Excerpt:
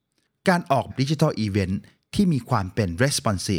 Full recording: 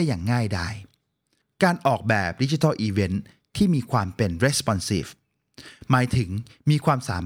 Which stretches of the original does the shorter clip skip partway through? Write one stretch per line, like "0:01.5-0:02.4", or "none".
0:02.0-0:02.3